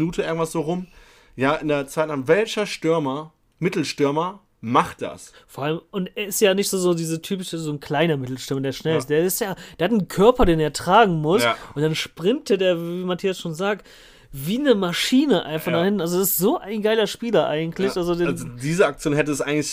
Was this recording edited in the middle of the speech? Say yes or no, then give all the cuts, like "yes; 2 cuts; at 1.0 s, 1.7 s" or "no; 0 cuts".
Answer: no; 0 cuts